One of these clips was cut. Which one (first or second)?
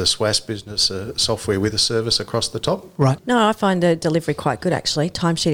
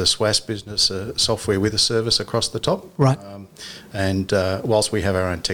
first